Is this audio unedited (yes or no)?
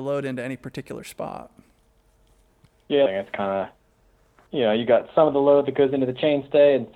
no